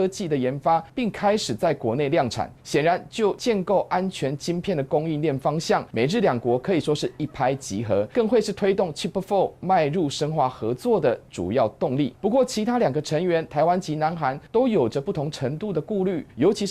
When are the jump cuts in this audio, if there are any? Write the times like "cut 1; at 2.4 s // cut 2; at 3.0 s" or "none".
none